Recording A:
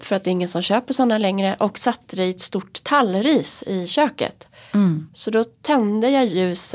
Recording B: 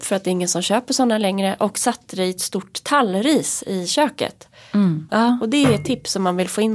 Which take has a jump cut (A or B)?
B